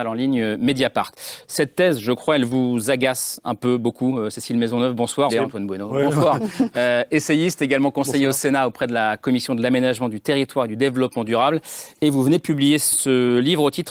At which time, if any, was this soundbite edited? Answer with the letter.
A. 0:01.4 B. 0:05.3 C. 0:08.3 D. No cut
B